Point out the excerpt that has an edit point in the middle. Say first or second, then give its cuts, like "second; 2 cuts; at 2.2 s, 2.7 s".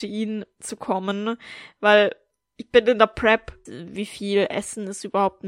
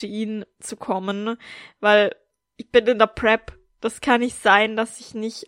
first; 1 cut; at 3.7 s